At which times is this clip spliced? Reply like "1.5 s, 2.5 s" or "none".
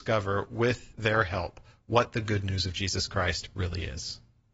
none